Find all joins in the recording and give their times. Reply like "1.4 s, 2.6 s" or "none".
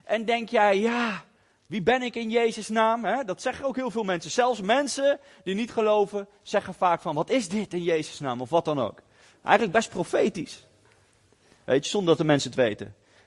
none